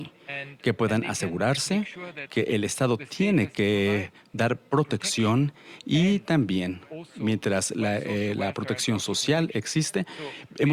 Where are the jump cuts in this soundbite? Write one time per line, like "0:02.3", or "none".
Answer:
none